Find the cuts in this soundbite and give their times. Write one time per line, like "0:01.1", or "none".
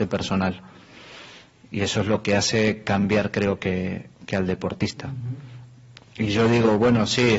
0:06.0